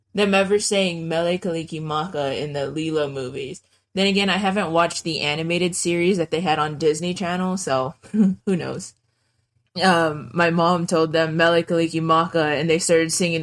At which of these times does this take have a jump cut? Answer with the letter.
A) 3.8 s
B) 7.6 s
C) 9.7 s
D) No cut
C